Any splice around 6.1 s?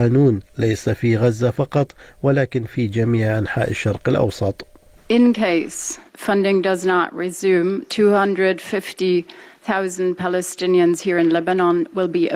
yes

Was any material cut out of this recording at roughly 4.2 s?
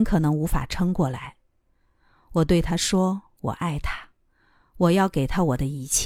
no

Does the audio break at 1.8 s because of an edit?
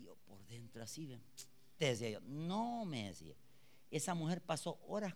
yes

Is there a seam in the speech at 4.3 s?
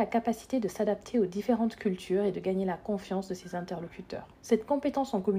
yes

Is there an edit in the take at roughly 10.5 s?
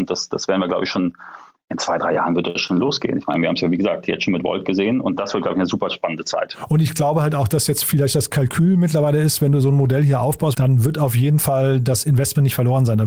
yes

